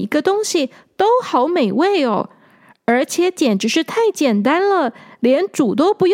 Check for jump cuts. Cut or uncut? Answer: uncut